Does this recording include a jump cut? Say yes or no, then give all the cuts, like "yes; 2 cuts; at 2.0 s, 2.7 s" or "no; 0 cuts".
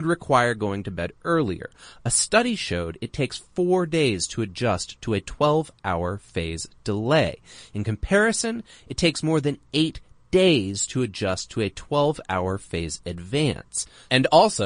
no; 0 cuts